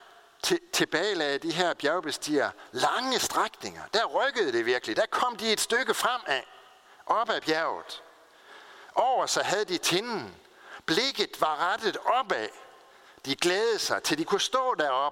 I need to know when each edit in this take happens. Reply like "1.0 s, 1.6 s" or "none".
none